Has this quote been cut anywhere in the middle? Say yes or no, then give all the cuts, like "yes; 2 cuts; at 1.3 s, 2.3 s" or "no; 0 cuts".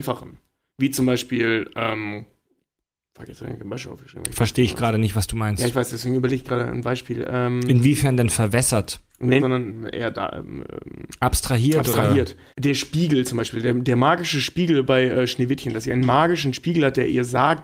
yes; 2 cuts; at 9.4 s, 12.5 s